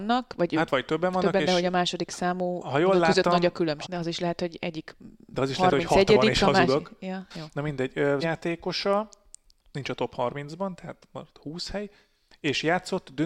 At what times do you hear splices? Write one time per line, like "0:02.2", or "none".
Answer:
0:03.8
0:08.2